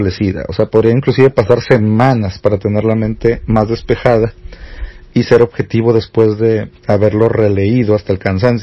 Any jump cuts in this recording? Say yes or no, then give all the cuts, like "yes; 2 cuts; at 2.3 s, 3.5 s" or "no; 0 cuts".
no; 0 cuts